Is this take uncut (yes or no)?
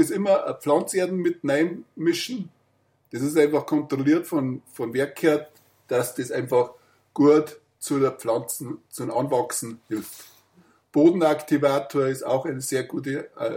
yes